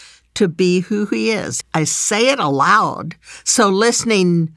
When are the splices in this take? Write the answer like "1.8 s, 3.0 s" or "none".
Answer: 1.6 s